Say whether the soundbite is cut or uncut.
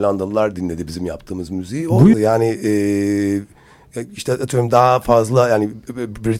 cut